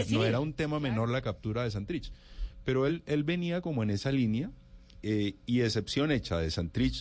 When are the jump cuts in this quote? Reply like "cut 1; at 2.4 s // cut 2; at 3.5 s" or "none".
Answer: none